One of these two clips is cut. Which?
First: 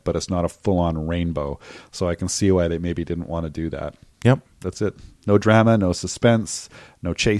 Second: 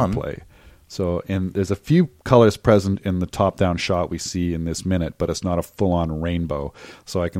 first; 1 cut; at 4.1 s

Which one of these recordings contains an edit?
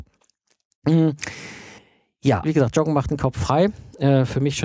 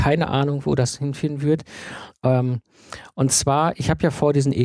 first; 1 cut; at 2.4 s

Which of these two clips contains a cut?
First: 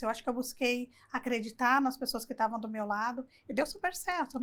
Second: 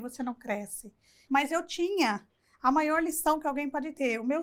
second; 1 cut; at 1.3 s

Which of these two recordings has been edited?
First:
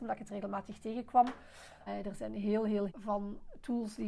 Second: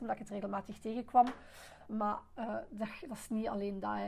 first; 2 cuts; at 1.9 s, 2.9 s

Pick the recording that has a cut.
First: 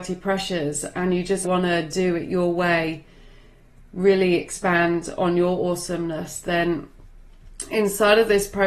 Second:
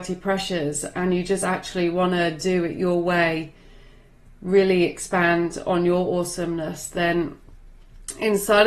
first; 1 cut; at 1.4 s

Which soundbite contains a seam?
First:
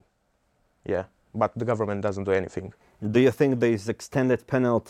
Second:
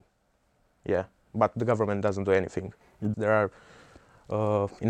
second; 1 cut; at 3.1 s

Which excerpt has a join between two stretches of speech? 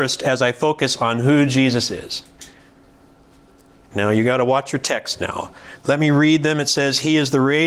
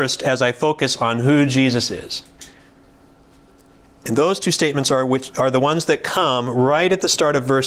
first; 1 cut; at 3.9 s

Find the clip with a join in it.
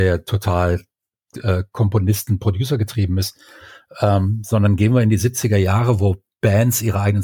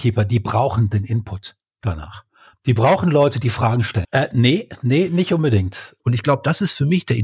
second; 2 cuts; at 4.0 s, 6.0 s

